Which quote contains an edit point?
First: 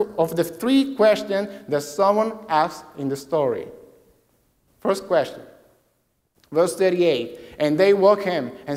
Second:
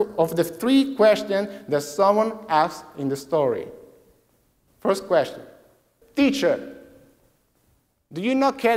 second; 1 cut; at 6.0 s

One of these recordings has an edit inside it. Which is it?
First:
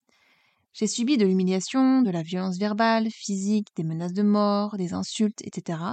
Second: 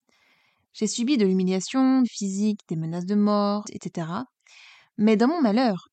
second; 2 cuts; at 2.0 s, 3.6 s

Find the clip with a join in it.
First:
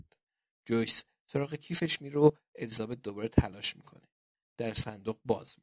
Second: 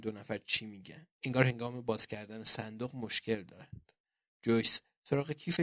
second; 1 cut; at 1.1 s

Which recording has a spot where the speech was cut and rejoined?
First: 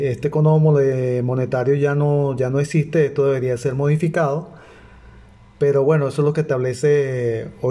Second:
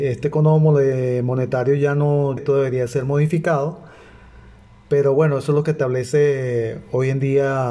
second; 1 cut; at 2.4 s

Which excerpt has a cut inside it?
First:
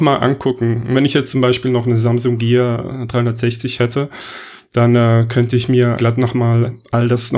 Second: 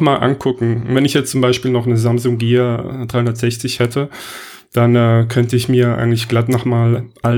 first; 1 cut; at 6.0 s

